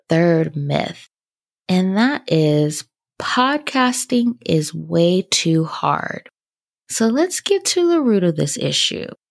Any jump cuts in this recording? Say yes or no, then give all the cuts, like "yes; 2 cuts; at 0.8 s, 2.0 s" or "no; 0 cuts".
no; 0 cuts